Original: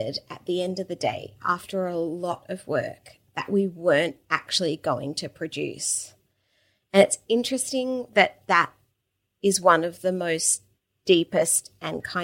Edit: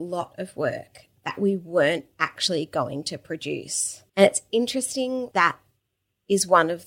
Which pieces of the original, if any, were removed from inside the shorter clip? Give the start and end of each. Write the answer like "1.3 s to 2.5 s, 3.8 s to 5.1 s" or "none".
6.2 s to 6.9 s, 8.1 s to 8.4 s